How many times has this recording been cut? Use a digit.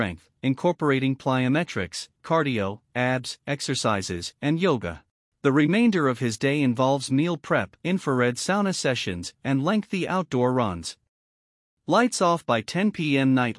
3